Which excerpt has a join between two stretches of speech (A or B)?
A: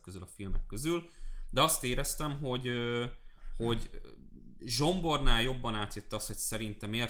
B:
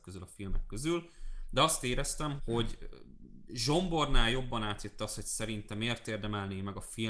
B